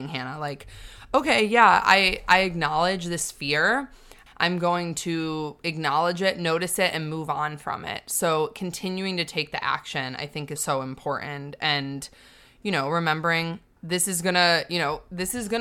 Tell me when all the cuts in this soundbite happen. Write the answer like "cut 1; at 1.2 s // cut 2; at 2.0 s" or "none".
cut 1; at 4.3 s // cut 2; at 10.6 s // cut 3; at 13.8 s